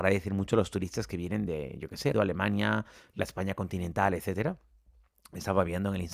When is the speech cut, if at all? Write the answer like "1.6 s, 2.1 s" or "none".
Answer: 2.1 s